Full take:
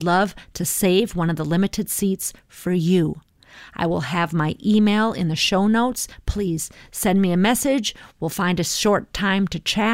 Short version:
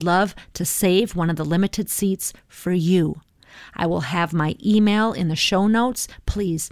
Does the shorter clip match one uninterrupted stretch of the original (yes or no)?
yes